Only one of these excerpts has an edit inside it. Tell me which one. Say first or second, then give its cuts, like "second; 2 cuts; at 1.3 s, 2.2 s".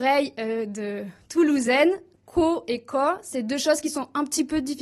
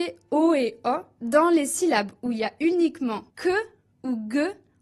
second; 1 cut; at 3.3 s